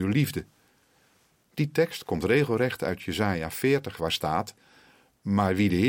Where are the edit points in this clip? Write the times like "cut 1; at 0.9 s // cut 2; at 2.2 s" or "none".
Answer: cut 1; at 4.0 s